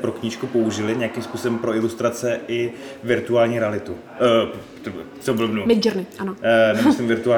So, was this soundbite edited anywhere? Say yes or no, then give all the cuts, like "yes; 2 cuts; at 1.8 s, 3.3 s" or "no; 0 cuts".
no; 0 cuts